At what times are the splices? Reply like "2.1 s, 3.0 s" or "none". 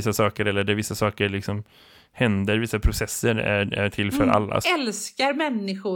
4.6 s